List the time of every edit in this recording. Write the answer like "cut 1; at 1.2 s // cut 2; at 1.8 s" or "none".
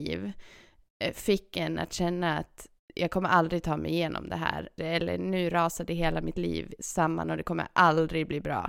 cut 1; at 4.8 s